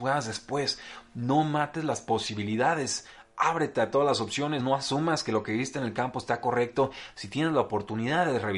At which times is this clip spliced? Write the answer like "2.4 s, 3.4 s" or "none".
none